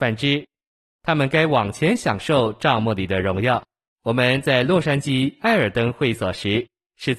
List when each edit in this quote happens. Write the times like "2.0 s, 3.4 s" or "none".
3.9 s